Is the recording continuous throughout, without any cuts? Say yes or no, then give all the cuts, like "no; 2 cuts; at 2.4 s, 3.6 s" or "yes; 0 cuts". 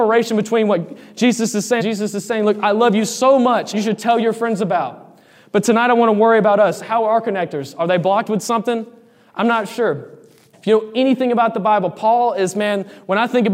no; 3 cuts; at 1.8 s, 3.7 s, 10.5 s